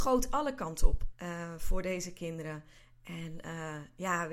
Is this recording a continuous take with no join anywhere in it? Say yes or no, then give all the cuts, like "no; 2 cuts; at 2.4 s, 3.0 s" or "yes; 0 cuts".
no; 1 cut; at 1.1 s